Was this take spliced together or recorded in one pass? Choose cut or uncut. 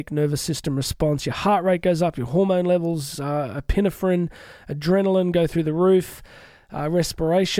uncut